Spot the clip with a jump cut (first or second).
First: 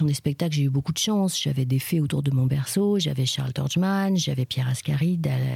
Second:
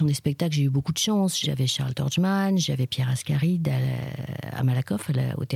second